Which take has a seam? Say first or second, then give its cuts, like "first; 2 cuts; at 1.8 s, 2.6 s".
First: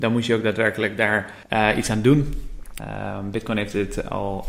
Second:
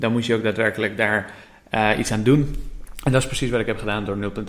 first; 2 cuts; at 1.4 s, 2.8 s